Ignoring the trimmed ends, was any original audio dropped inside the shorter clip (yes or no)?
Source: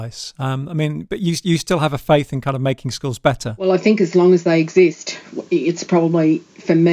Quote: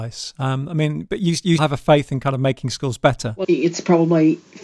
yes